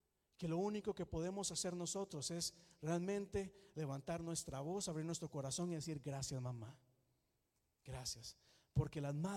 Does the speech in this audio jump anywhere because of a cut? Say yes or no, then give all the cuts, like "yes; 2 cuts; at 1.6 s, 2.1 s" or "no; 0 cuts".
no; 0 cuts